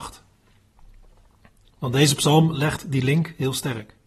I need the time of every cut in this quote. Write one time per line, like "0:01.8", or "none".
none

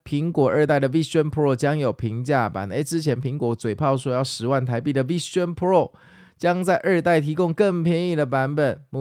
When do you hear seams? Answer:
none

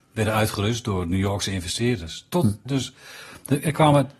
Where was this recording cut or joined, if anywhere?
0:02.7

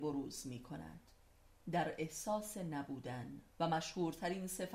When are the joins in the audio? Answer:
0:03.5

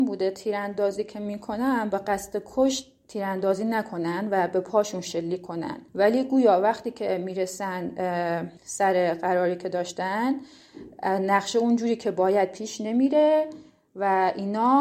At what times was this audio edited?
0:05.9
0:08.6

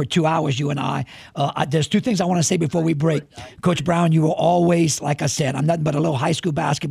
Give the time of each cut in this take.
none

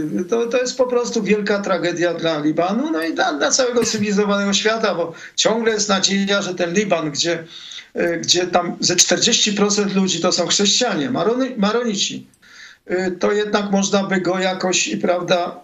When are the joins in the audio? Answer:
none

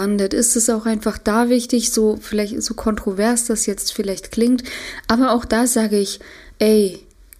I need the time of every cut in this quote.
none

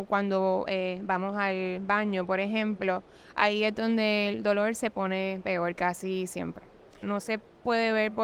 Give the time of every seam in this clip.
0:07.0

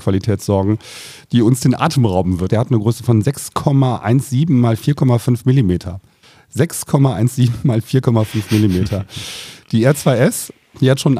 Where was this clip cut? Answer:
0:02.5

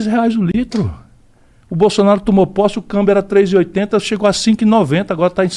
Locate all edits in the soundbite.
none

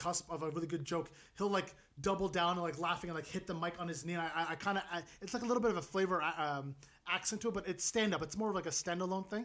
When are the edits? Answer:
none

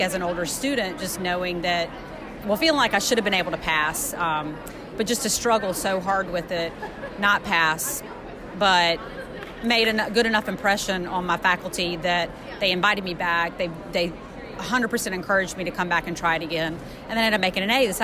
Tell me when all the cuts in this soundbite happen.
none

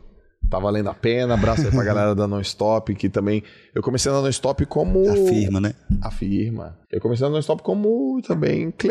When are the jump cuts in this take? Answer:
0:06.8

